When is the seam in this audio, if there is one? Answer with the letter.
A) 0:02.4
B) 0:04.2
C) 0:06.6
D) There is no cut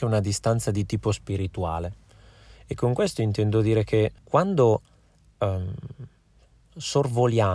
B